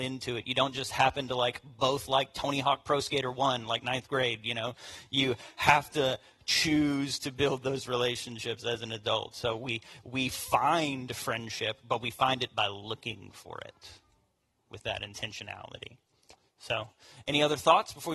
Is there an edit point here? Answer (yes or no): no